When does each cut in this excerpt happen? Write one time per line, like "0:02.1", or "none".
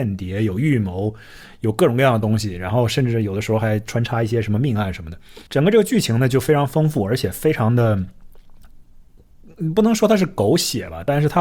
0:05.5